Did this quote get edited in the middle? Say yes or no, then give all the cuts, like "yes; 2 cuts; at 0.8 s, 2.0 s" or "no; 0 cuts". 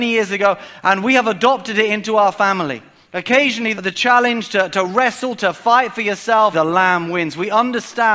yes; 3 cuts; at 3.7 s, 5.4 s, 6.5 s